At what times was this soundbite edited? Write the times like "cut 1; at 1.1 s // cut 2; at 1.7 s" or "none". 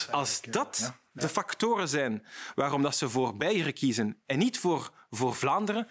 none